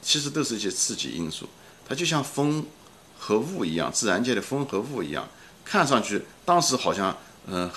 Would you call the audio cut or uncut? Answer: uncut